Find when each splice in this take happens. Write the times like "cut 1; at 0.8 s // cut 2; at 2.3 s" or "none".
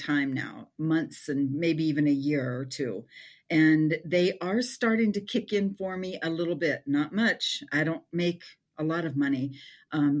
none